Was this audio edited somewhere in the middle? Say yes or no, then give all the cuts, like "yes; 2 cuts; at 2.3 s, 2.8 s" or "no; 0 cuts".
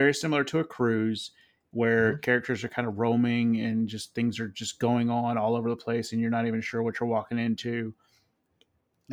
no; 0 cuts